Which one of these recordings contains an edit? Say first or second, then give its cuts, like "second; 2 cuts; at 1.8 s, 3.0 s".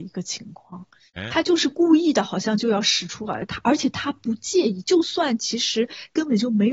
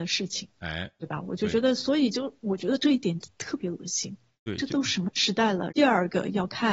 second; 1 cut; at 5.7 s